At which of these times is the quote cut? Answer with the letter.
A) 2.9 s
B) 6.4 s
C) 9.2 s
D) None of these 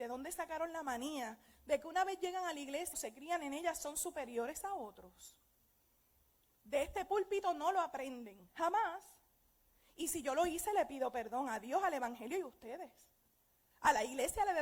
A